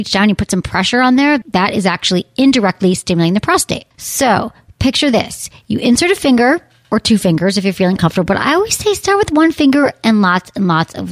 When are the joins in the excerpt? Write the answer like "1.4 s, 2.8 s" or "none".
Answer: 3.9 s